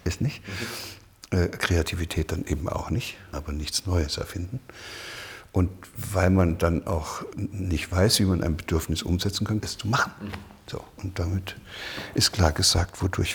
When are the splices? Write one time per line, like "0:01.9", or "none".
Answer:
0:03.3
0:07.3
0:09.6